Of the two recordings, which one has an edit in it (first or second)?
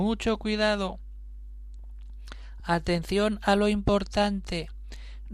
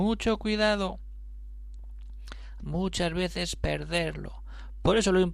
second